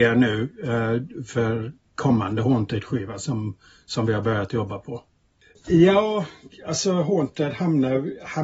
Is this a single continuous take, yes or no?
no